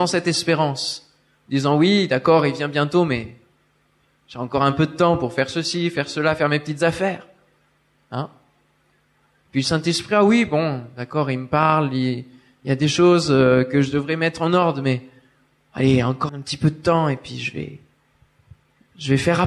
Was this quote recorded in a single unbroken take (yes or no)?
no